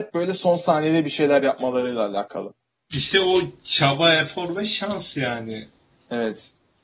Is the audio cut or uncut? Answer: cut